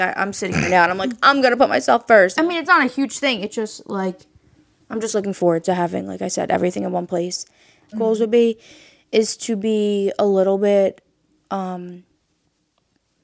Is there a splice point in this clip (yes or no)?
yes